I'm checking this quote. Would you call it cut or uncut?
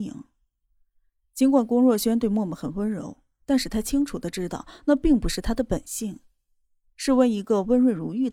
uncut